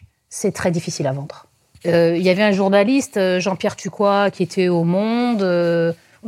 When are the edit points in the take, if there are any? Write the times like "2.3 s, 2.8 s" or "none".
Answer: 1.7 s